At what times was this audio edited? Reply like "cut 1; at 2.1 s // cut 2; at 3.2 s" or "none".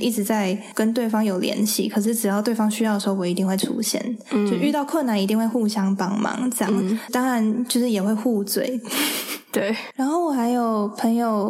none